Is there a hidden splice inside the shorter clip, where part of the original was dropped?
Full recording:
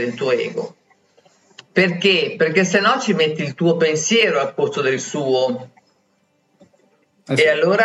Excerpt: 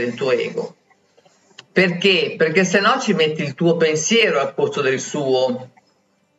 no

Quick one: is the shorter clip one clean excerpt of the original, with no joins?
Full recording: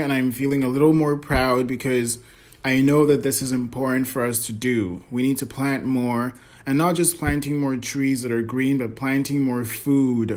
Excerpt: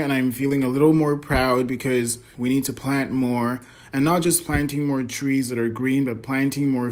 no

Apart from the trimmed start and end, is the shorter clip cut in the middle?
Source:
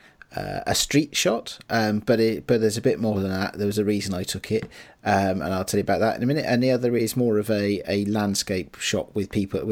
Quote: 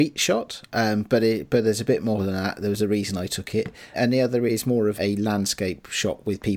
yes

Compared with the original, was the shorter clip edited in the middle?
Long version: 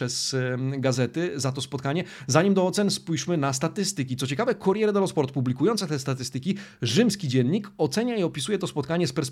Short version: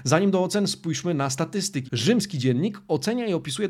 yes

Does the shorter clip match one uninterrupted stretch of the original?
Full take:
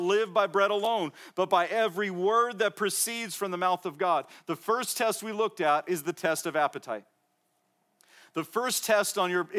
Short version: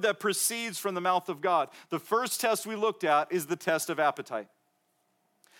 yes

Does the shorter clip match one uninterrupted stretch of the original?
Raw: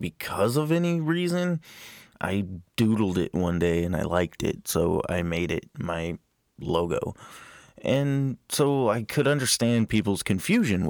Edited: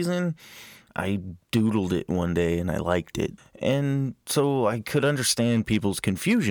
no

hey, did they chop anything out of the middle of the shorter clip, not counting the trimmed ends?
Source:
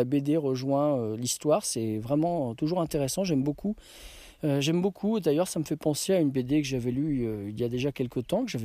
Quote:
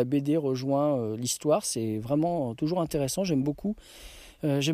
no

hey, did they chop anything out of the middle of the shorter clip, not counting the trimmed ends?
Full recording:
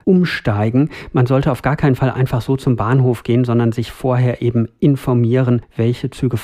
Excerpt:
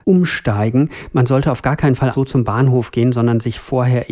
yes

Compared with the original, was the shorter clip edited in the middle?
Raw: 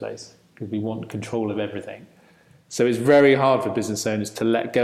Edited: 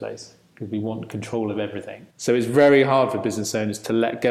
yes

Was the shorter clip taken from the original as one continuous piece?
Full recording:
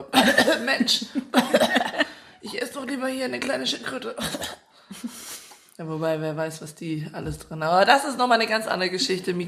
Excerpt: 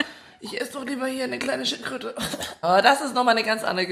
no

